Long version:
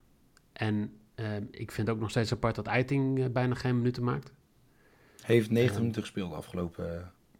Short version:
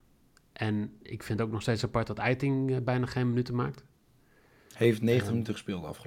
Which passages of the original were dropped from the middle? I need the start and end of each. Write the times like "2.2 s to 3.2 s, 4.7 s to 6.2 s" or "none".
1.0 s to 1.5 s